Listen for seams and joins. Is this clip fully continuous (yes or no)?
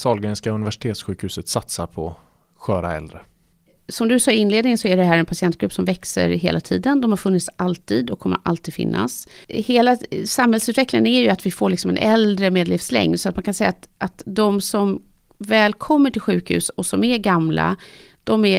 yes